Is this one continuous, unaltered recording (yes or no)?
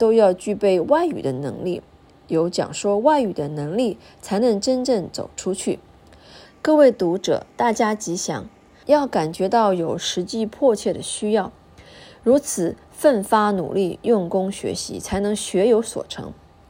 no